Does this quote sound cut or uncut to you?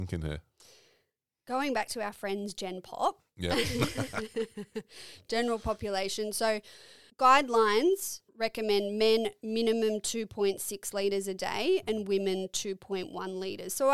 cut